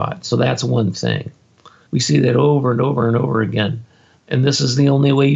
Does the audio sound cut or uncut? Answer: cut